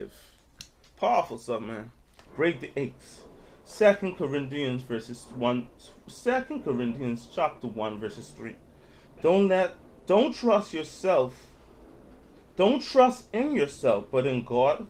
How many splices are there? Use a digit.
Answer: 1